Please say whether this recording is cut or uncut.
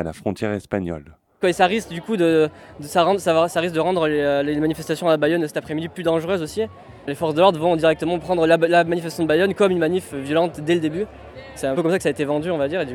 cut